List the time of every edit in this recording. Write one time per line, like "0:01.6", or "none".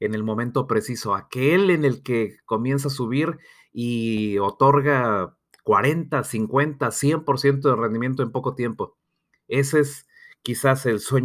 none